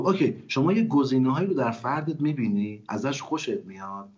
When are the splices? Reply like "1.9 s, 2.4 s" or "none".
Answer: none